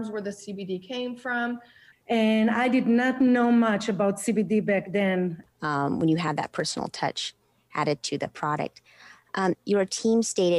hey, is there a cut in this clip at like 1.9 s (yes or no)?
yes